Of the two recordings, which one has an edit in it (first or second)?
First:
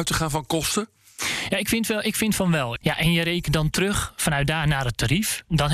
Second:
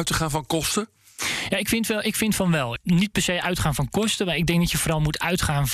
first